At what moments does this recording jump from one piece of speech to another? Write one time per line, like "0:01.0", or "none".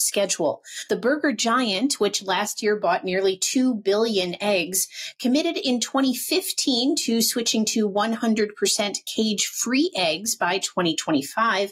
none

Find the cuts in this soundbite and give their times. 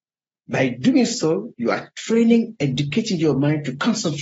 none

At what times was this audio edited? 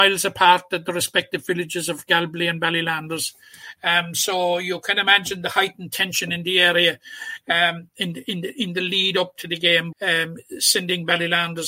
0:07.9
0:09.9

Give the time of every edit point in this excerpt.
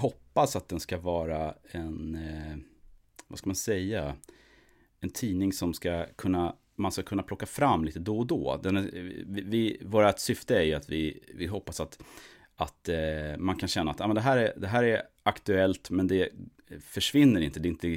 none

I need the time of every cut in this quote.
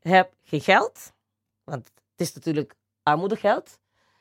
none

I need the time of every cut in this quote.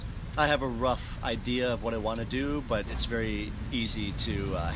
none

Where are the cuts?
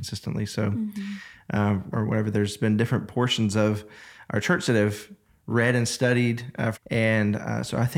0:01.9
0:06.7

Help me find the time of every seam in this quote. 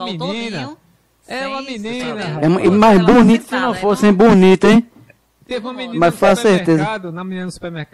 none

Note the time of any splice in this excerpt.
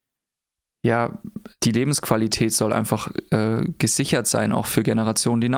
0:01.6

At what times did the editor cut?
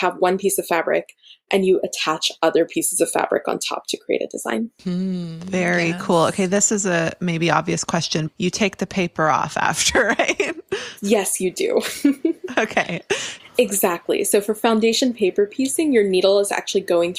0:08.3
0:13.4

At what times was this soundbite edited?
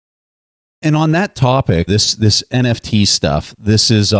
0:01.9

